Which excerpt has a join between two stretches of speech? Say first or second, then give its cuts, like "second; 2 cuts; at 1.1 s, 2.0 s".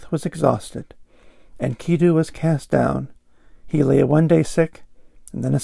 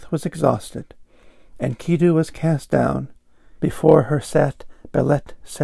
second; 1 cut; at 3.6 s